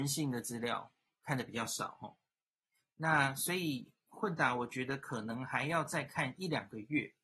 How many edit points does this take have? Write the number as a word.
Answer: zero